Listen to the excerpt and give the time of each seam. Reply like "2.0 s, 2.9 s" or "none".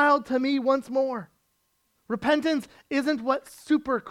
1.9 s